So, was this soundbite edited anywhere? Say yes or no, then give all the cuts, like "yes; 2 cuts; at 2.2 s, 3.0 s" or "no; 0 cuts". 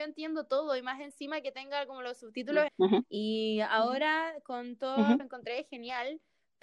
yes; 2 cuts; at 2.7 s, 5.2 s